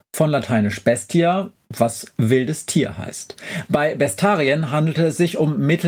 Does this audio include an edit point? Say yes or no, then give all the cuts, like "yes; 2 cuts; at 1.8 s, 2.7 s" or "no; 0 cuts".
no; 0 cuts